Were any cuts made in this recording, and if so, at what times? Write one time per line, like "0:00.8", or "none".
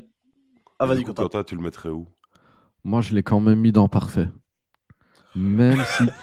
none